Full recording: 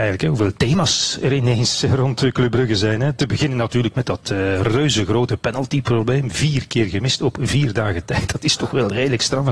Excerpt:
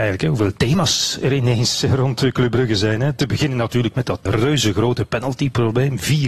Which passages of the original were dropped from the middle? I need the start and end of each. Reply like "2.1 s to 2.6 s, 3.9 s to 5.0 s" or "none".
4.3 s to 4.6 s